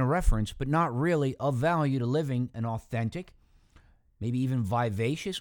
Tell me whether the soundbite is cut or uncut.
uncut